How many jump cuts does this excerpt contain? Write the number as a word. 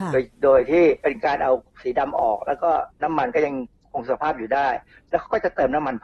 one